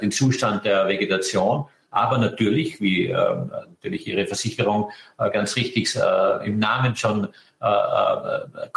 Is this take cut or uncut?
cut